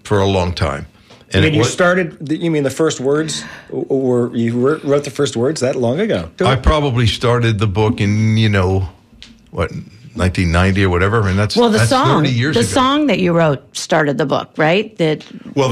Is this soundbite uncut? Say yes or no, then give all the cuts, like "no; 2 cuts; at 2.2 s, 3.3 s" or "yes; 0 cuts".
no; 1 cut; at 6.4 s